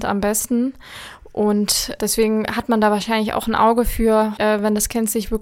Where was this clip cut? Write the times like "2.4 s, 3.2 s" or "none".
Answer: 4.4 s